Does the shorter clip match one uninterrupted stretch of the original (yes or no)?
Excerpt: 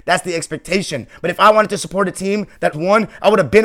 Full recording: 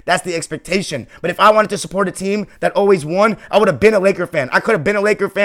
no